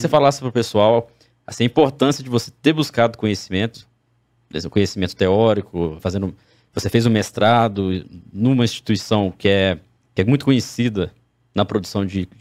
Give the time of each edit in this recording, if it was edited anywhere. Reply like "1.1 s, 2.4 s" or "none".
6.0 s